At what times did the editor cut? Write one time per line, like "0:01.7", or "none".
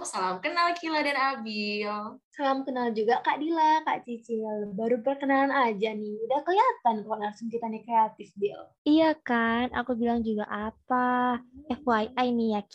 none